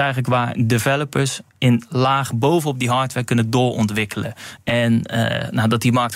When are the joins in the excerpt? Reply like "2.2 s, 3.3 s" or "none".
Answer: 1.5 s, 4.6 s